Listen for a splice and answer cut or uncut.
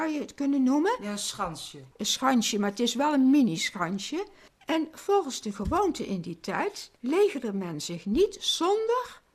cut